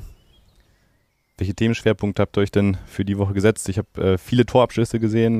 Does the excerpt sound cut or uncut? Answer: uncut